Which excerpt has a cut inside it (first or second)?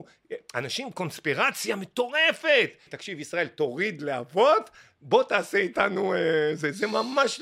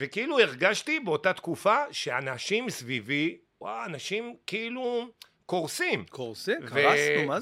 first